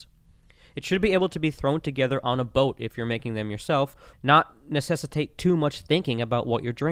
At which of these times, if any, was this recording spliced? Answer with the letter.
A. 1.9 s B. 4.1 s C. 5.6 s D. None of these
B